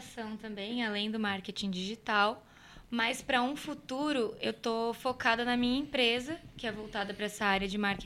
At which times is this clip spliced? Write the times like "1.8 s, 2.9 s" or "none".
none